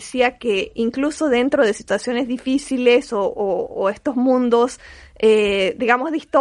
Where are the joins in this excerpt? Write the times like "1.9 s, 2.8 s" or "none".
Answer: none

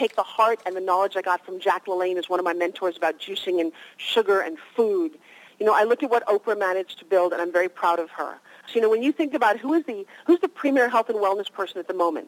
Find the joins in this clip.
5.5 s, 8.7 s

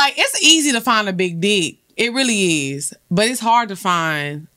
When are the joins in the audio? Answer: none

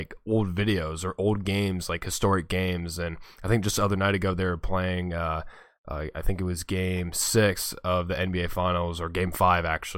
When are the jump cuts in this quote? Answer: none

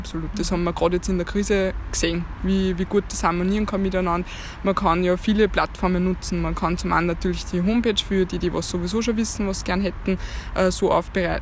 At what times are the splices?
none

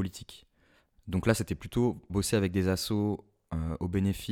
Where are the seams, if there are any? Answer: 1.0 s, 2.1 s

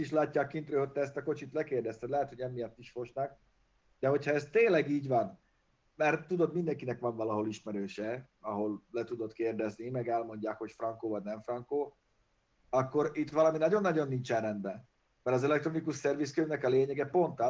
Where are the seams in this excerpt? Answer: none

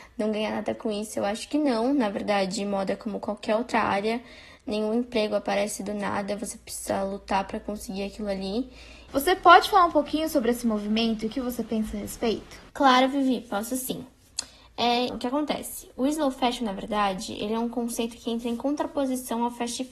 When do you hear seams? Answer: 9.1 s, 12.7 s, 15.1 s

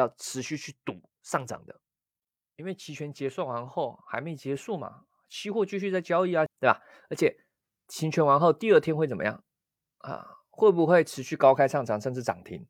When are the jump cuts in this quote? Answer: 6.5 s

